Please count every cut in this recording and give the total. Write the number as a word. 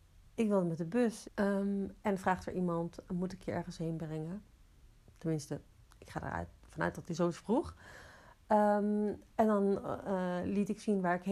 one